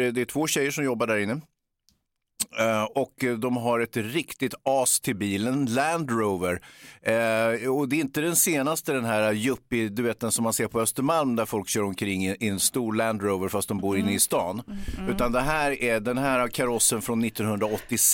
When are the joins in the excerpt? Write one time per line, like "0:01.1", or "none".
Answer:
none

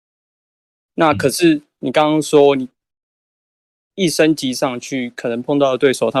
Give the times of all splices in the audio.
none

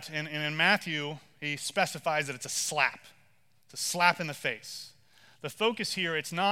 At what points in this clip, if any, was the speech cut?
none

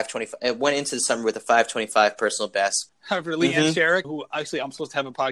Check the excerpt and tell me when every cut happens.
0:02.9
0:04.0

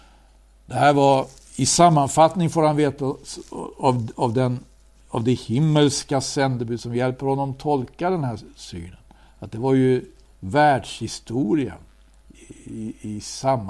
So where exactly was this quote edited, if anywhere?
none

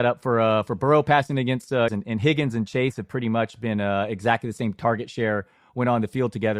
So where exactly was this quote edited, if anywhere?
0:01.9

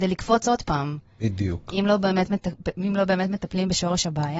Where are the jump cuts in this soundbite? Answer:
none

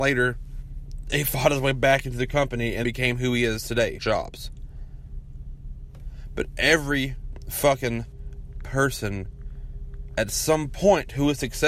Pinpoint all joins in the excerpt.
0:02.8
0:04.0

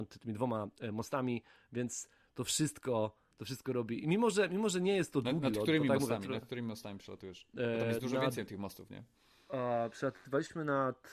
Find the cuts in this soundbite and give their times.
none

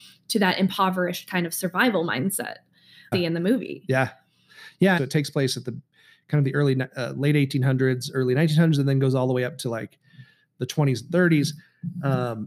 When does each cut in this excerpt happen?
0:03.1
0:05.0

